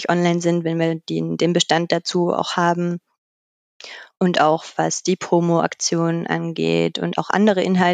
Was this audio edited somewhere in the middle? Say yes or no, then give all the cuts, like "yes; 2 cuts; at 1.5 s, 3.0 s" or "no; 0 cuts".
no; 0 cuts